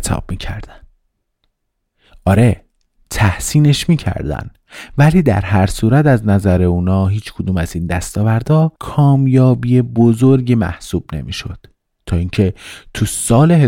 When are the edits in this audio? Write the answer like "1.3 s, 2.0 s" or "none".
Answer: 8.8 s